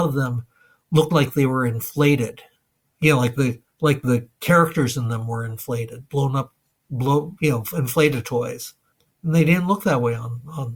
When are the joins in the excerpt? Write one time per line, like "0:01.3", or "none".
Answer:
none